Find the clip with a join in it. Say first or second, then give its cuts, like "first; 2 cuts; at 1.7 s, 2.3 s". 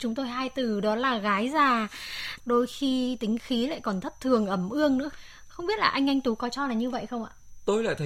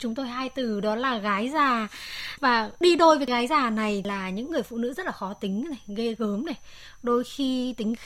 first; 1 cut; at 2.4 s